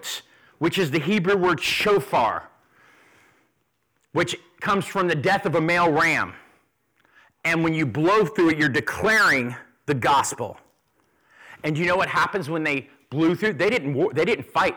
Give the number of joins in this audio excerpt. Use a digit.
0